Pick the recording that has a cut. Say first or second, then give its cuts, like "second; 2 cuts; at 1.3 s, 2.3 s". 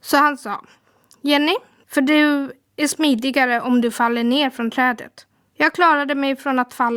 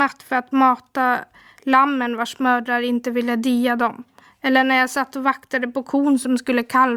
first; 2 cuts; at 1.8 s, 5.5 s